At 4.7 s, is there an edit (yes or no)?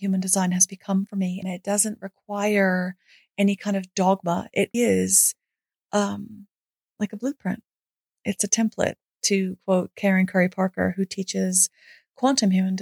yes